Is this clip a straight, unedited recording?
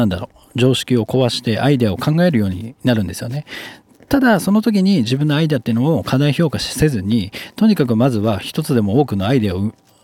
yes; 0 cuts

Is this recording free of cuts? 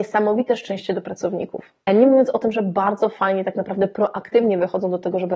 no; 1 cut; at 1.9 s

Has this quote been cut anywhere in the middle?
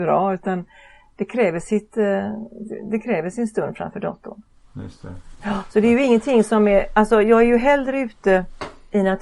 no; 0 cuts

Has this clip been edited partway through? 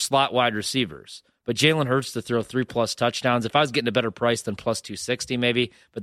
no; 0 cuts

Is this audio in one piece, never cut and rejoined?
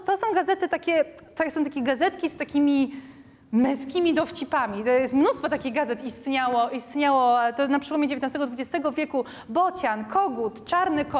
yes; 0 cuts

